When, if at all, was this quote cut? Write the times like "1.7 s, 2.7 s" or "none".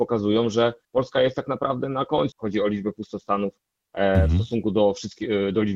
2.3 s